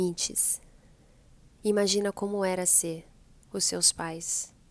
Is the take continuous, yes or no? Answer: no